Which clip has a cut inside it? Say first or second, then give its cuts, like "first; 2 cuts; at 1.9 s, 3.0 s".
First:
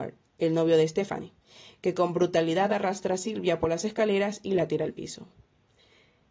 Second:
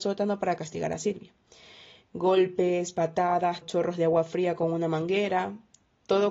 second; 1 cut; at 3.6 s